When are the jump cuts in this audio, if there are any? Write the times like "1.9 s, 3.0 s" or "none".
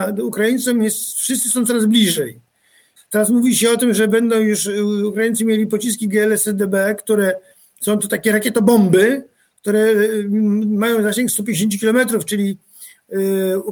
3.0 s